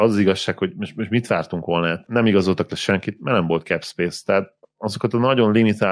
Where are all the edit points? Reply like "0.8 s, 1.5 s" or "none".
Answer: 2.0 s